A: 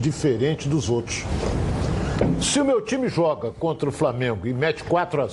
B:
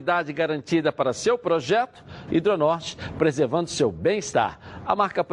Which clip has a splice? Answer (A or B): B